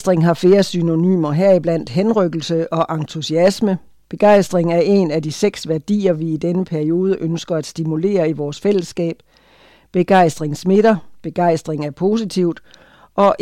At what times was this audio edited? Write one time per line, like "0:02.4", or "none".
none